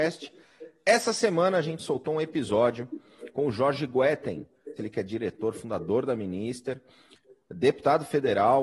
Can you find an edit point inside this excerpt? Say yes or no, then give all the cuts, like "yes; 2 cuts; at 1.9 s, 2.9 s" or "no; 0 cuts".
yes; 1 cut; at 4.8 s